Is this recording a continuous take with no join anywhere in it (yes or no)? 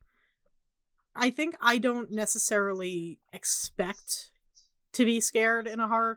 no